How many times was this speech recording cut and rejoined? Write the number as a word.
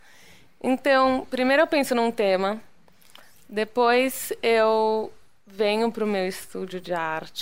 zero